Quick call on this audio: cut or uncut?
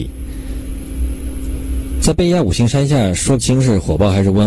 uncut